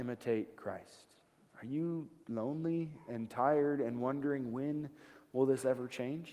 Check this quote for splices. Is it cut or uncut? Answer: cut